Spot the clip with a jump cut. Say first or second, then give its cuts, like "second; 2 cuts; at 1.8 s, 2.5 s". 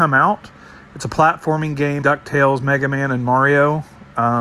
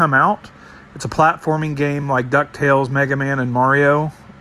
first; 1 cut; at 2.0 s